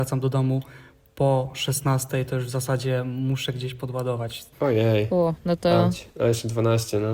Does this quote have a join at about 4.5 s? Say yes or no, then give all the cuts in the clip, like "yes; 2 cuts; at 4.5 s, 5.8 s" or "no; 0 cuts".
yes; 1 cut; at 4.5 s